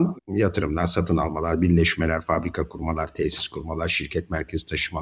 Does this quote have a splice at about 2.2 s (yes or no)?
no